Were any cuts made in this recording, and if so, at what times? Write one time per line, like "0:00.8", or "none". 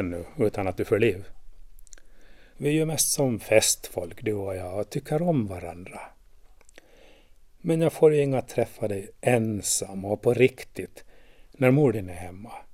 0:02.5